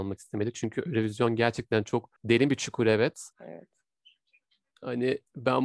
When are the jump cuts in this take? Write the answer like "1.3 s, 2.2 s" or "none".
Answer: 2.2 s, 3.3 s